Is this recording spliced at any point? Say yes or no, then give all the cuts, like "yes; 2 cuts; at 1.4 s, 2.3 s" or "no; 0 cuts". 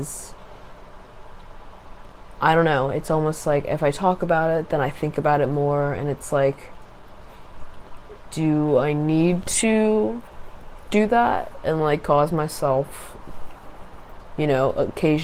no; 0 cuts